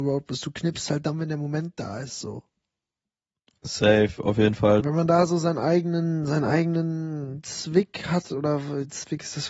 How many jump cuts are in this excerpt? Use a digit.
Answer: 1